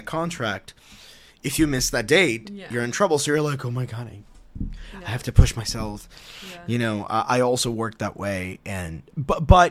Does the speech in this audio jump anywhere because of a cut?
no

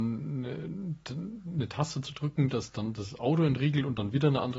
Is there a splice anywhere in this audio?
no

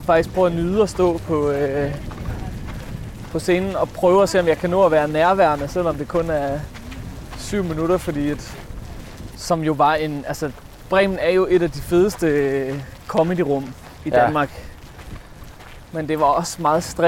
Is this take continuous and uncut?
no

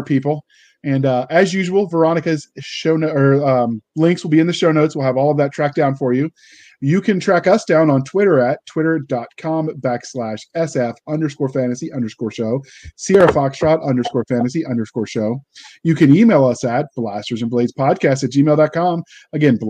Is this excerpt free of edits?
yes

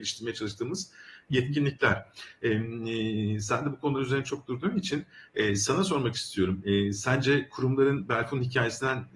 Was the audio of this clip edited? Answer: no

